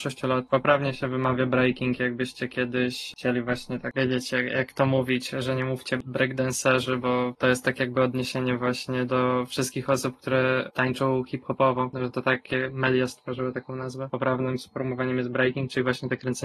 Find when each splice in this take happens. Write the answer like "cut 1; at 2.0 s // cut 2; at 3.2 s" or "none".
none